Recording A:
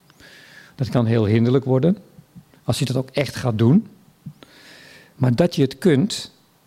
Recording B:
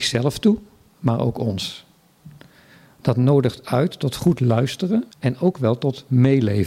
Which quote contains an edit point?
B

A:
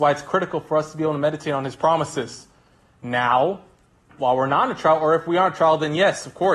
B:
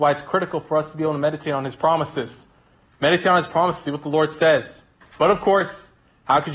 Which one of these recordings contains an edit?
B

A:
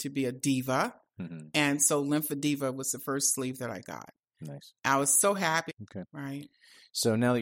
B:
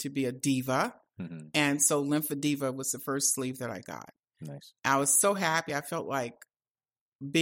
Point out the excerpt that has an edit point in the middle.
A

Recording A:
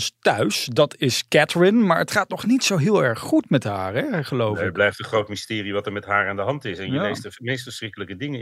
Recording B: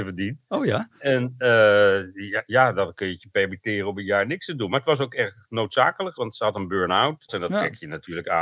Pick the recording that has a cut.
B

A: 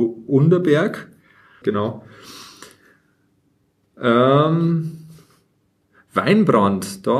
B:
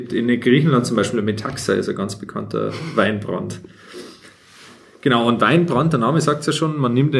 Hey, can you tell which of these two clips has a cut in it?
A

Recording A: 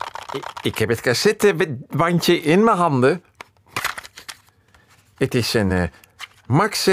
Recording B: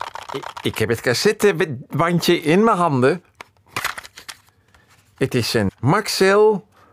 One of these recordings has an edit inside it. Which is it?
B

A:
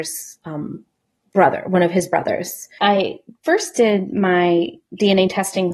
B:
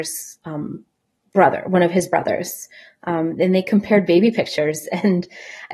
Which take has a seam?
A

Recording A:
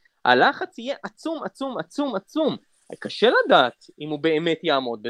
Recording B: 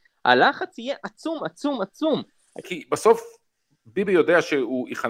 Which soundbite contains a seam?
B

